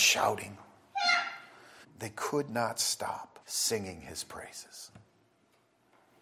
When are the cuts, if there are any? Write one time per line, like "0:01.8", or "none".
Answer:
0:01.8
0:03.4